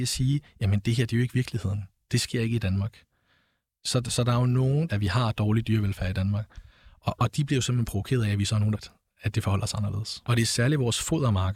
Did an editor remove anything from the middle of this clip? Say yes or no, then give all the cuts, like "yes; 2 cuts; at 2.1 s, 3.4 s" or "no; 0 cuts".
yes; 3 cuts; at 4.9 s, 8.7 s, 10.3 s